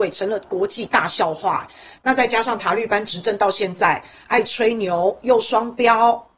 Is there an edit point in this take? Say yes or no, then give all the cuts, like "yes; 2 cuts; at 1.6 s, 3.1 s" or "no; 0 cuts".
yes; 1 cut; at 2.0 s